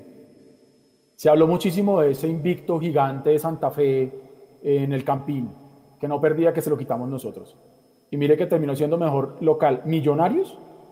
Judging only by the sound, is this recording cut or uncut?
uncut